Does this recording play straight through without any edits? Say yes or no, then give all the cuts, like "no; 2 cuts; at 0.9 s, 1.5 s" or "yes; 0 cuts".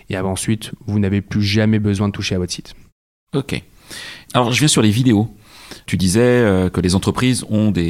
yes; 0 cuts